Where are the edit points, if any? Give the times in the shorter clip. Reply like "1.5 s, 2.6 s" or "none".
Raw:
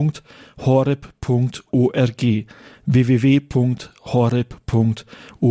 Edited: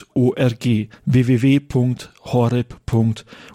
1.0 s